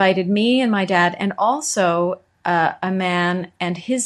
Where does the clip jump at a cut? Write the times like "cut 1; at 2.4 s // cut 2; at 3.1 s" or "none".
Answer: none